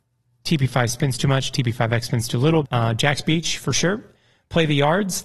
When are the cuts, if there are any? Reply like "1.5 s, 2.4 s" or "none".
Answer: 2.6 s